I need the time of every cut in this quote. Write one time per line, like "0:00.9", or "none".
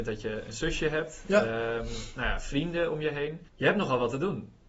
0:03.5

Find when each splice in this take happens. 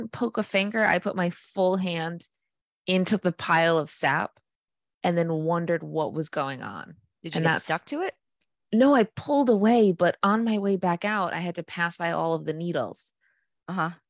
none

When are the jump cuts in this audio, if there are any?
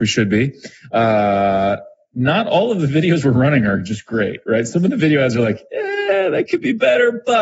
none

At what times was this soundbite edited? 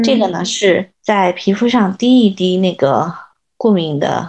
0:01.0

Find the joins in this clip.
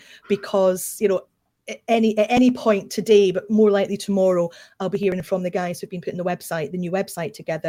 none

